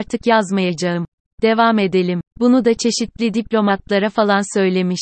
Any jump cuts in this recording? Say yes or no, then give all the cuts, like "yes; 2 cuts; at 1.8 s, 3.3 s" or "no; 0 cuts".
yes; 1 cut; at 2.3 s